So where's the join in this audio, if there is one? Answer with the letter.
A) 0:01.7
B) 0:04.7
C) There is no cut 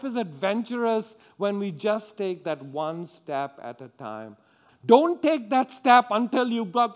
B